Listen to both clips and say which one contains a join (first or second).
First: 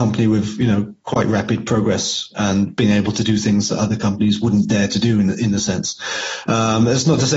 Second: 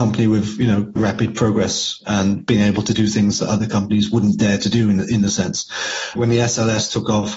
second